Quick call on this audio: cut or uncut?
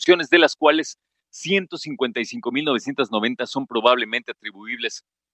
uncut